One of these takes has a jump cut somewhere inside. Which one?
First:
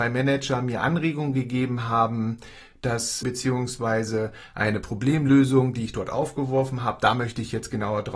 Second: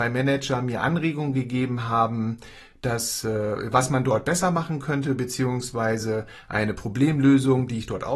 first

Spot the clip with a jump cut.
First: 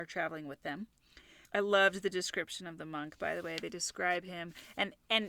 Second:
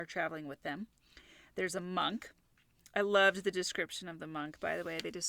first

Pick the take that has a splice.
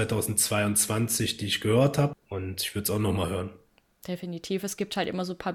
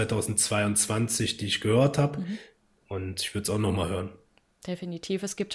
first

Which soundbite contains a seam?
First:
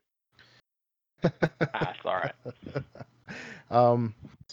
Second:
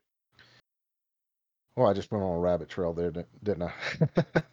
first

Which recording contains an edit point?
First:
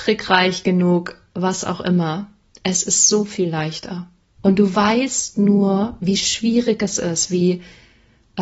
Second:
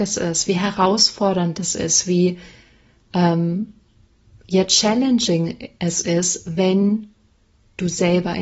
first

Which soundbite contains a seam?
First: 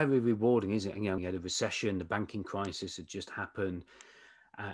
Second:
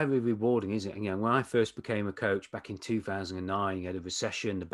first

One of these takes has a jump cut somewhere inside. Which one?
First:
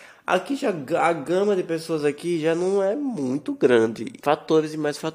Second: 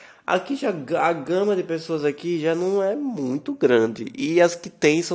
first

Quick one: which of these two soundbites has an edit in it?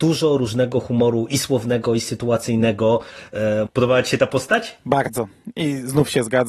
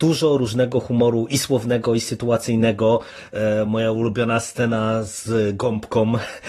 first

